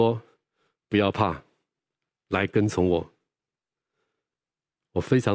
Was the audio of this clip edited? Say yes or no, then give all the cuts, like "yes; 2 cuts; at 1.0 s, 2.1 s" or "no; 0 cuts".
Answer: no; 0 cuts